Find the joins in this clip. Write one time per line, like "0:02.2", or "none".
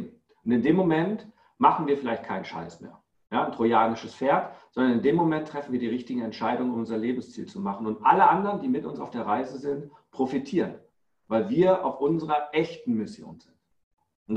none